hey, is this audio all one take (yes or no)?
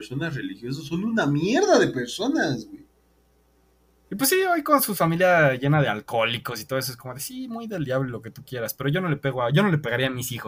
no